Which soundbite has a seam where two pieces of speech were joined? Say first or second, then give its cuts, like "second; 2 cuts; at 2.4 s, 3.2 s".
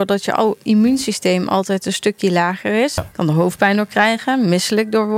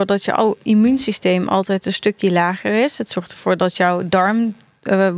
first; 1 cut; at 3.0 s